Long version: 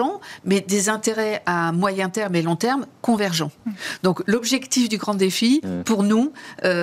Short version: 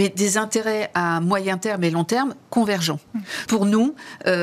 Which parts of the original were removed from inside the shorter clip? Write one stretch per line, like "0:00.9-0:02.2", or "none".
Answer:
0:04.0-0:05.8